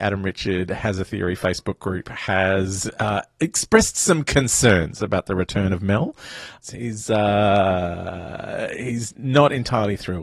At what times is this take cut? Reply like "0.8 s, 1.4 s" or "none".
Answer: 6.6 s